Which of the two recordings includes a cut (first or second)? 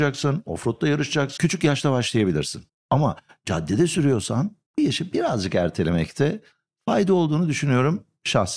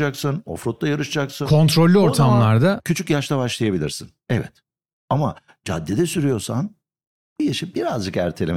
first